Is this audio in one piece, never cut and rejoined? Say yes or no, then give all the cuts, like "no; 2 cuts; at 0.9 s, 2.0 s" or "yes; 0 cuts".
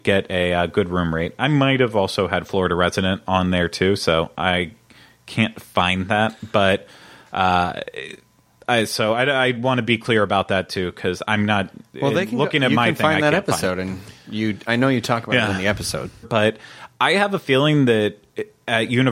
no; 1 cut; at 16.2 s